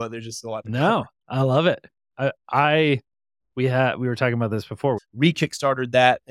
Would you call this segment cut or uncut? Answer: cut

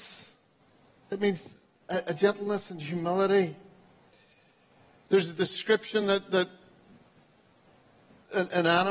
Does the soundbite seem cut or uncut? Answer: uncut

